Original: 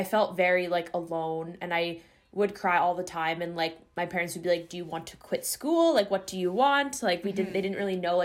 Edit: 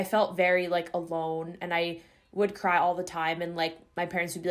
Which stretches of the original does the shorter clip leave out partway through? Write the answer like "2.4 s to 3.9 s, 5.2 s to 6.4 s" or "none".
none